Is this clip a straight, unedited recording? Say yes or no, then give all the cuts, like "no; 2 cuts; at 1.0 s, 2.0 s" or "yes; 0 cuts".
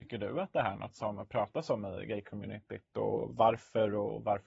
yes; 0 cuts